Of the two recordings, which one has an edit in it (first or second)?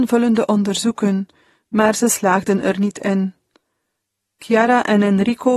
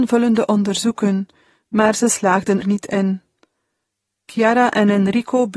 second